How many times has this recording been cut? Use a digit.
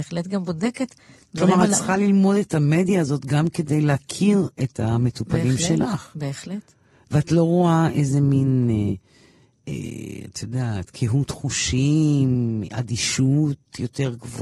0